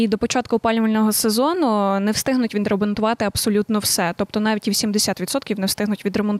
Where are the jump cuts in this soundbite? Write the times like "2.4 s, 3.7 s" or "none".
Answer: none